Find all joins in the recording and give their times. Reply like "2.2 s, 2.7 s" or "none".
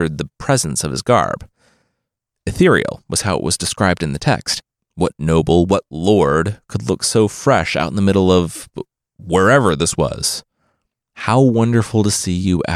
4.9 s